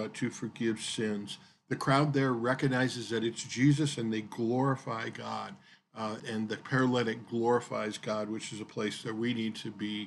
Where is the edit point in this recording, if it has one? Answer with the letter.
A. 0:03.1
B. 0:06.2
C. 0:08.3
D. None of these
B